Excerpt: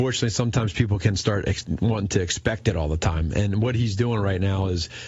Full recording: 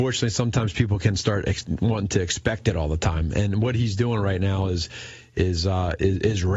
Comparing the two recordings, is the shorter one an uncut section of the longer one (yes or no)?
yes